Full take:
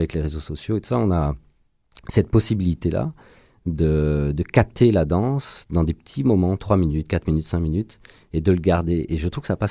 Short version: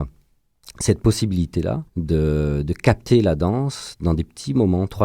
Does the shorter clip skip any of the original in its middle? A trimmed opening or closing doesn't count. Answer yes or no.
yes